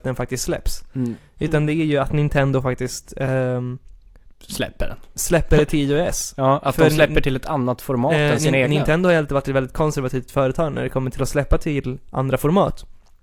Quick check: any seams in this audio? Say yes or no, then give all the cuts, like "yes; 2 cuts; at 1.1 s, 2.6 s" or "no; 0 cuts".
no; 0 cuts